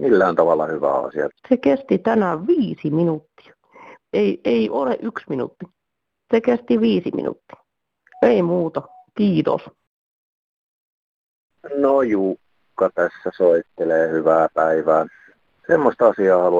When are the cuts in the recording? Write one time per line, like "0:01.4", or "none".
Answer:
0:01.3
0:04.0